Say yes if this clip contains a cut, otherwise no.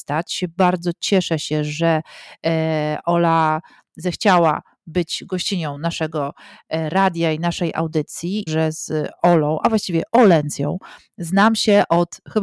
yes